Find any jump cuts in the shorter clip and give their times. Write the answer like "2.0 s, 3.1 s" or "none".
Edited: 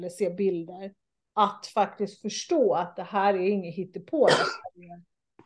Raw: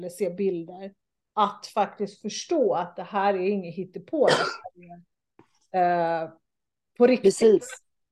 none